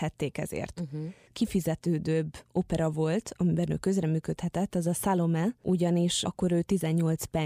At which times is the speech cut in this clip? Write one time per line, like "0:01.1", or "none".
0:06.2